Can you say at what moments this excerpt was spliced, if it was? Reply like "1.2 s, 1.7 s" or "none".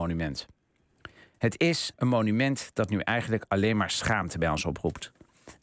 1.9 s